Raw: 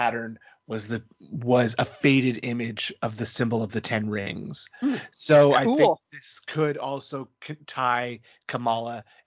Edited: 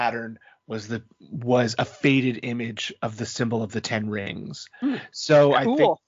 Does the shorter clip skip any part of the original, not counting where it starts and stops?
no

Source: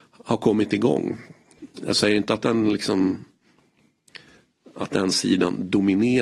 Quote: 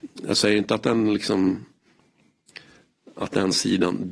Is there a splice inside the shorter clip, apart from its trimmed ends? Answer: no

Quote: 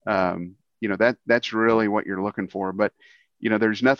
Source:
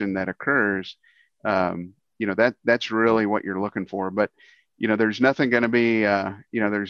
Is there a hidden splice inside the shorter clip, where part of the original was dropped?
no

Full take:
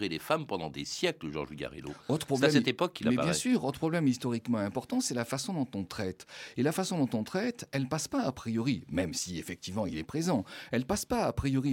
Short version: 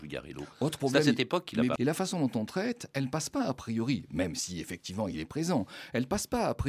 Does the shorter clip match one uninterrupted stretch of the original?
no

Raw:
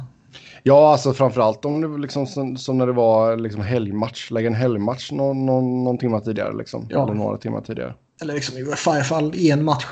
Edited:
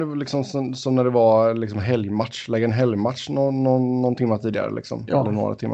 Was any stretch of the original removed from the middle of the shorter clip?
no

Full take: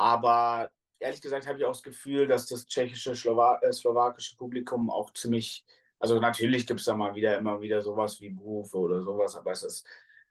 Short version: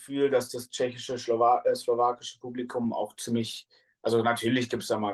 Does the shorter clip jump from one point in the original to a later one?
no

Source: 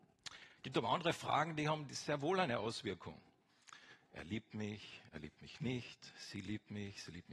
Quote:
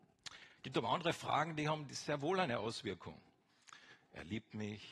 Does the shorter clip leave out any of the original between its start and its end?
no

